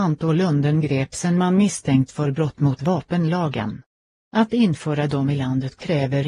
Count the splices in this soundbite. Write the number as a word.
one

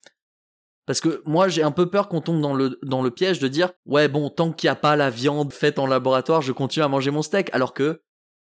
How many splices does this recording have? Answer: two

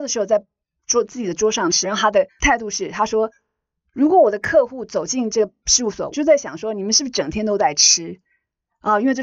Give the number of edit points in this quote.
two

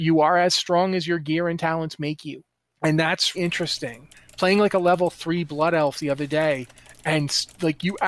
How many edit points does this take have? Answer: one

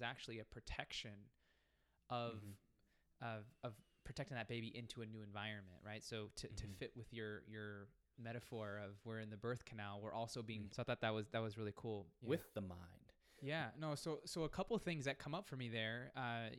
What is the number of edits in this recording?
two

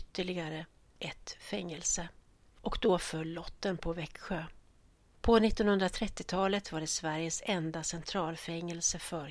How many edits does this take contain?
zero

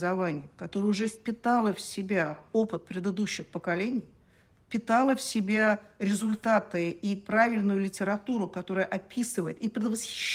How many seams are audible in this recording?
zero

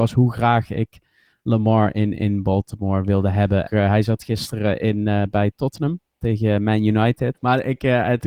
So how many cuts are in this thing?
two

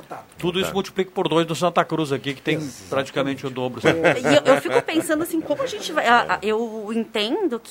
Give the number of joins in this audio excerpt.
one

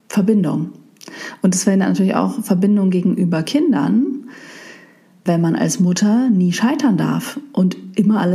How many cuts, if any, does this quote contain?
one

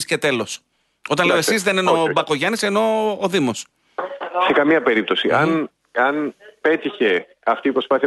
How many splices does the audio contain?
zero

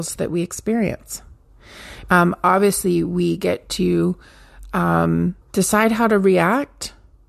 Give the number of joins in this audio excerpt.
two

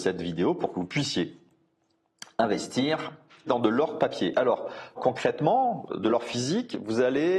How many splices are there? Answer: two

